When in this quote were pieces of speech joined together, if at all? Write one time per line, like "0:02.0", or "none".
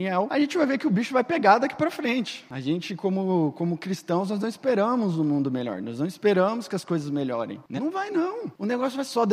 0:07.8